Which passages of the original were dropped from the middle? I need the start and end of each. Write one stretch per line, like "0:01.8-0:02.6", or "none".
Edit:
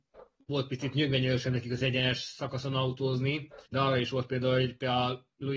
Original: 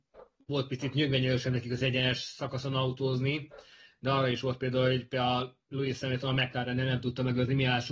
0:03.7-0:04.0